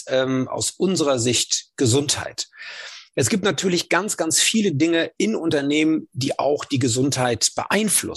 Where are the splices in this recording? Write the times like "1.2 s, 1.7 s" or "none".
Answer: none